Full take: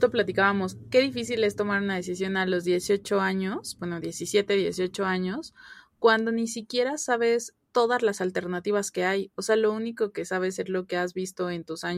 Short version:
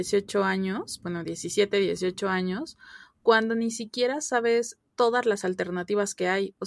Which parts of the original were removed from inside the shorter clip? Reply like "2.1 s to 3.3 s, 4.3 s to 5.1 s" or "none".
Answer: none